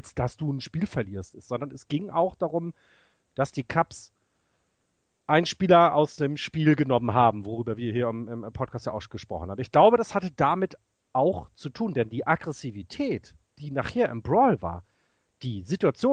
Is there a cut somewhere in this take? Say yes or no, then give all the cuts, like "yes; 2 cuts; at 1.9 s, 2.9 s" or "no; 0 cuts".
no; 0 cuts